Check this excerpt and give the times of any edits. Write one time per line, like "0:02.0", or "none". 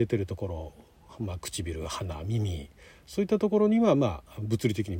none